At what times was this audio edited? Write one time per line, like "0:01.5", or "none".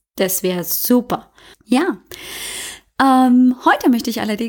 0:01.5